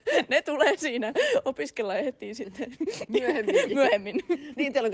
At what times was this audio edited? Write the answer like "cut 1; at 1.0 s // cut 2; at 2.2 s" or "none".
none